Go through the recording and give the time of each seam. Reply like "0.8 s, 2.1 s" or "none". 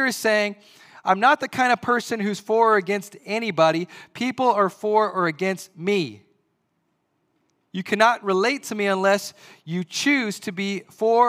none